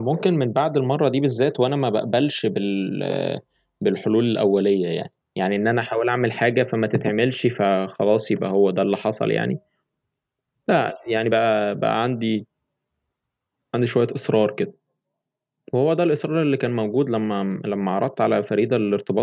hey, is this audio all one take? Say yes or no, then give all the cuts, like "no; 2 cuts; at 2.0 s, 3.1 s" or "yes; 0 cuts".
yes; 0 cuts